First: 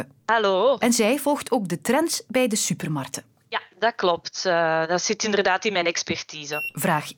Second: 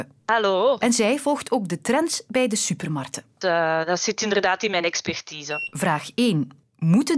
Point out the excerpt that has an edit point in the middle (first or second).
second